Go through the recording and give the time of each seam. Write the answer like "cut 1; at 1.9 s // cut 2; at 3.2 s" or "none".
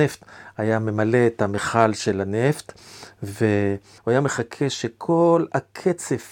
cut 1; at 4.0 s